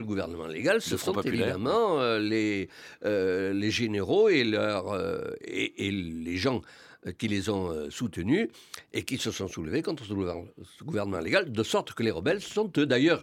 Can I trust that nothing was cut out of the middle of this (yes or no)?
yes